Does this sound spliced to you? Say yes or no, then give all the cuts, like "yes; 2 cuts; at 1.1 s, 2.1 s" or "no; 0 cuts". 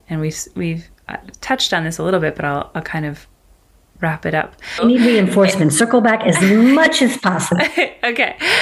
yes; 1 cut; at 4.8 s